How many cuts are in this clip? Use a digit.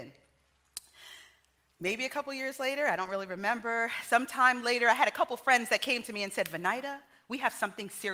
0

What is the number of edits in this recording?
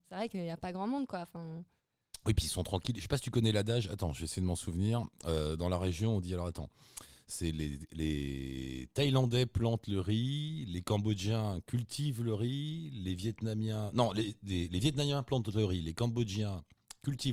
0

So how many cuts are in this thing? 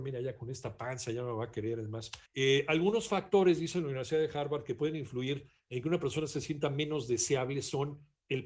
1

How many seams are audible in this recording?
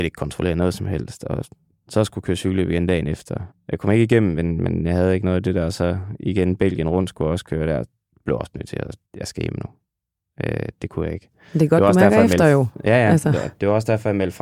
2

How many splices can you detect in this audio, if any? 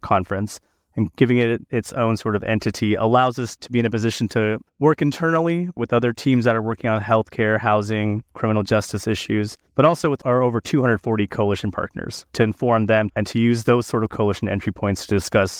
2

